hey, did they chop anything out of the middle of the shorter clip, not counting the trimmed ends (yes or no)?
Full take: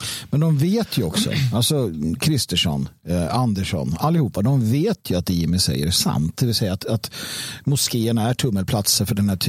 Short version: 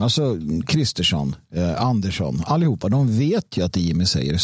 no